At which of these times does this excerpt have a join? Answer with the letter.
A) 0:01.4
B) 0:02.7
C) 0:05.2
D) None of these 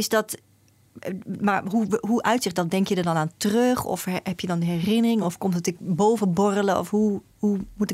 D